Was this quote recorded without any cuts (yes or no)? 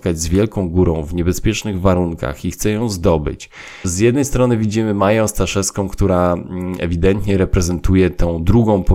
no